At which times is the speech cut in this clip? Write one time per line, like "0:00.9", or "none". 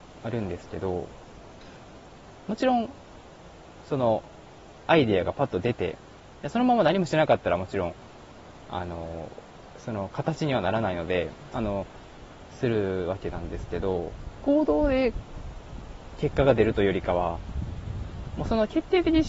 0:11.5